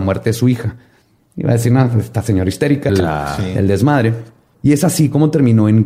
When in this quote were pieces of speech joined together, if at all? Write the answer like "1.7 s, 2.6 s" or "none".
2.9 s, 4.5 s